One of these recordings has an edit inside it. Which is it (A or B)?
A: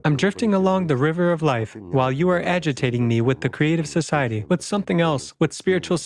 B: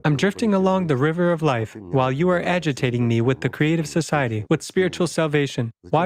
B